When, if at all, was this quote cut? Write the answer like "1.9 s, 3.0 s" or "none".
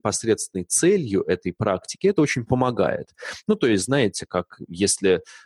none